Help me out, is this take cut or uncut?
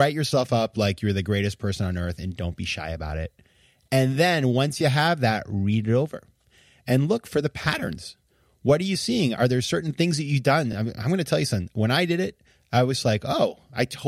uncut